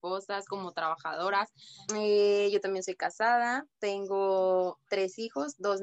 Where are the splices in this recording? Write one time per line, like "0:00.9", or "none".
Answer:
0:01.9